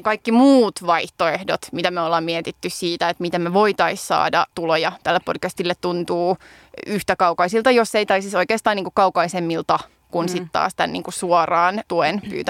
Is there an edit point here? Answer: no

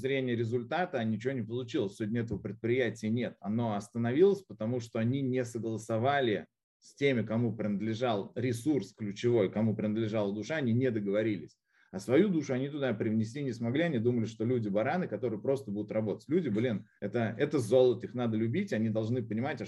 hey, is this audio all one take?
no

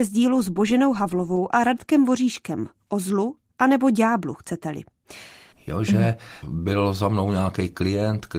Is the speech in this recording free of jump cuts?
no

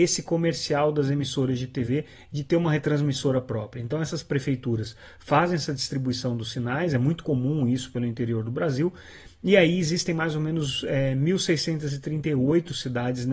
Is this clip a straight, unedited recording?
yes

